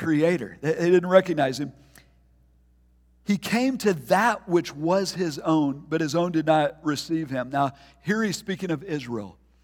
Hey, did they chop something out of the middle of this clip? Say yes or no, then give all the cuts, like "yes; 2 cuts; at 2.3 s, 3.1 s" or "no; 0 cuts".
no; 0 cuts